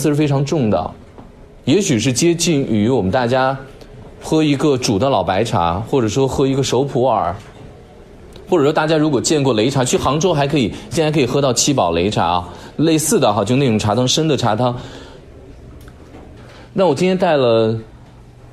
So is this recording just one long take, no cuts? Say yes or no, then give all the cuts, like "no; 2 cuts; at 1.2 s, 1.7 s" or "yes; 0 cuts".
no; 1 cut; at 16.4 s